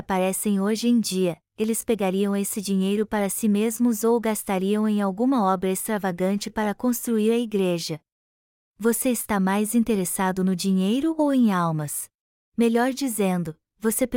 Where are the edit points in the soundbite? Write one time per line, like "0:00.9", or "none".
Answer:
0:08.6
0:12.5